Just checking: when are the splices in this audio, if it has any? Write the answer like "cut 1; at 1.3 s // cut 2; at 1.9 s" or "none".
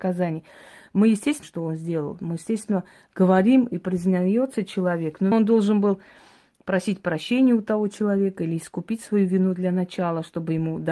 cut 1; at 1.4 s // cut 2; at 5.3 s